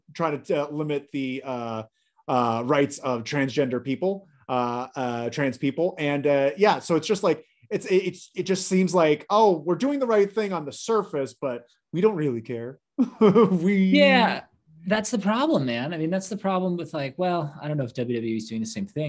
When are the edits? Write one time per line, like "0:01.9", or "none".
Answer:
none